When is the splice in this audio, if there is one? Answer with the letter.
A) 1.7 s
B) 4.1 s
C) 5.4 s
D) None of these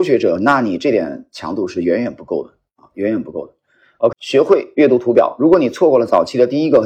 B